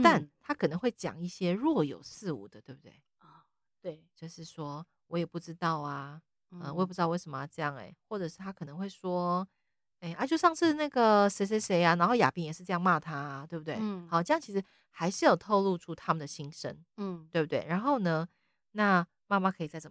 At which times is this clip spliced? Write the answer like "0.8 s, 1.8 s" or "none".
none